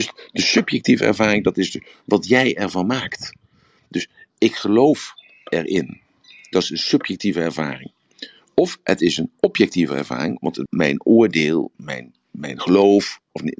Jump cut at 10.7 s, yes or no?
yes